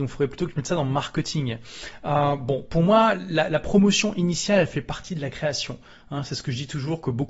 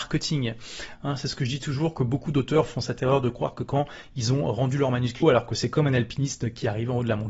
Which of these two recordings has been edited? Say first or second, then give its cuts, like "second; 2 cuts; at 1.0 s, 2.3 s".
second; 2 cuts; at 0.9 s, 5.2 s